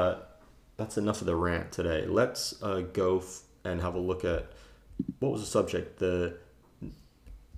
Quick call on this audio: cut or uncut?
uncut